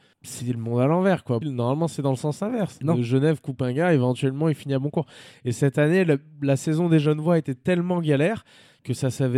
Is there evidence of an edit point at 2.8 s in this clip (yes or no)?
no